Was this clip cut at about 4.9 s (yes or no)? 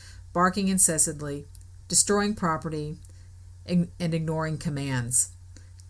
no